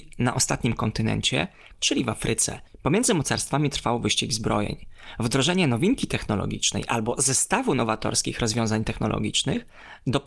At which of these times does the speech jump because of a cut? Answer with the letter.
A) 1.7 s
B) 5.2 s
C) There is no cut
A